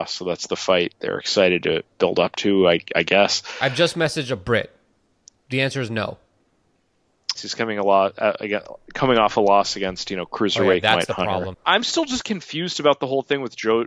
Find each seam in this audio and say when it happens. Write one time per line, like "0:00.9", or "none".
0:07.4
0:11.5